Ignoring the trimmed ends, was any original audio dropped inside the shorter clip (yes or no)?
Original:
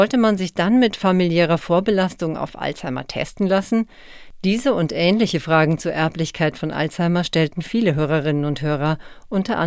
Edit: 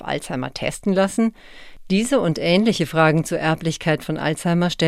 no